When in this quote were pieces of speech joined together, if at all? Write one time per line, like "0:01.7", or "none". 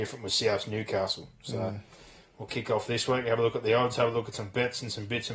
none

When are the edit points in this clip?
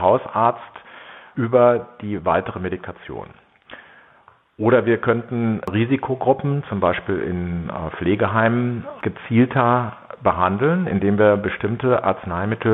none

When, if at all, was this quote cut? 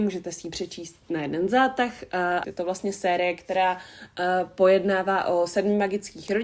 0:02.4

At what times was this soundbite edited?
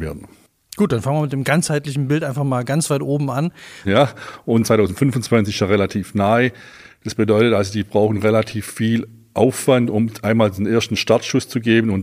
0:03.8

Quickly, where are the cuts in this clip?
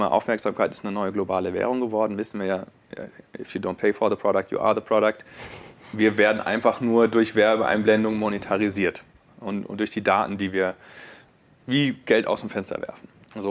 none

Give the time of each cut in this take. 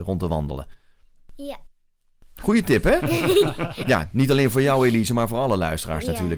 none

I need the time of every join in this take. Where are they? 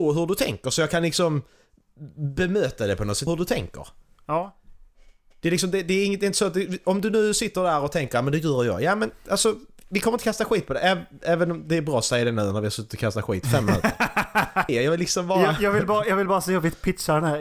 0:03.3
0:14.7

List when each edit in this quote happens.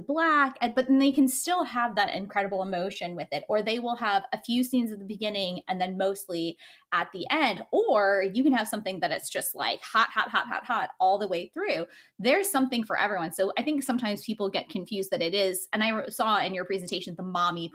none

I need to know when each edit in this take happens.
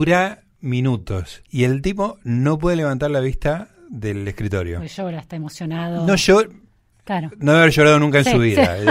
0:01.5

